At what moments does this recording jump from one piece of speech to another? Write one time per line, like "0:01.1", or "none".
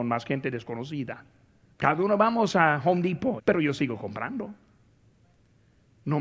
0:01.7
0:03.4